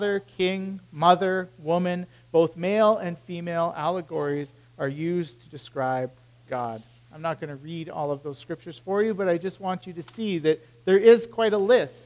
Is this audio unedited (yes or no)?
yes